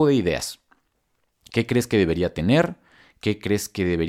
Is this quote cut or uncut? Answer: uncut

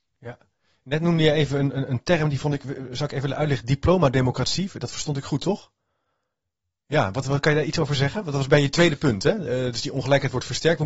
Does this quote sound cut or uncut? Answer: uncut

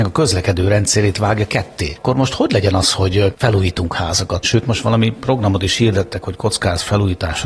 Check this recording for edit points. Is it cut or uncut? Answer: cut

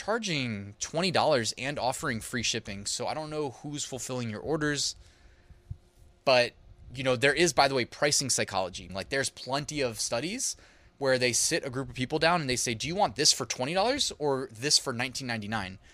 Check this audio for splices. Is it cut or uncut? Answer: cut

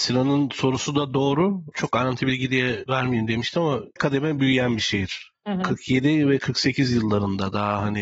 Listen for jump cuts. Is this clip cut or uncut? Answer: cut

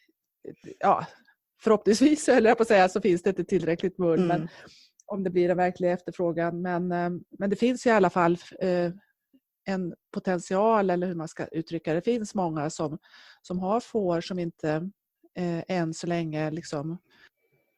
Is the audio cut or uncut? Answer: uncut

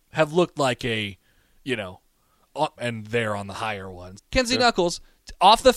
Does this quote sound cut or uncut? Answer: cut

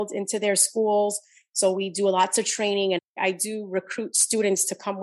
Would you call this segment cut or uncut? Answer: uncut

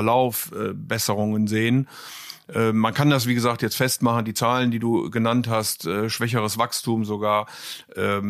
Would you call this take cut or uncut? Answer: uncut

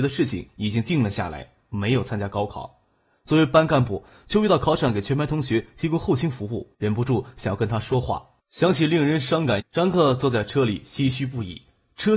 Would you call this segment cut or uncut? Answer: cut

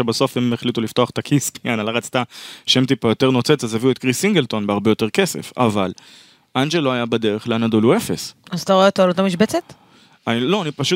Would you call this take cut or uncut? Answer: uncut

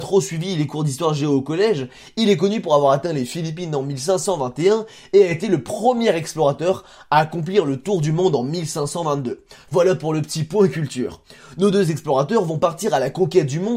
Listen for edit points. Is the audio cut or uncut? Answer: uncut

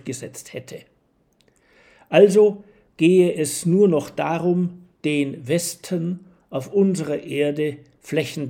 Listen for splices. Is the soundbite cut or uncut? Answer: uncut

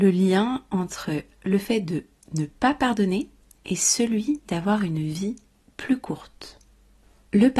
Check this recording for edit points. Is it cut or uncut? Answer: uncut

